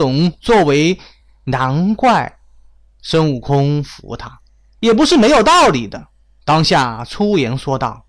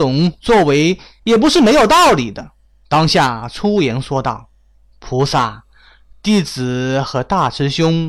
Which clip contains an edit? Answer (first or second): second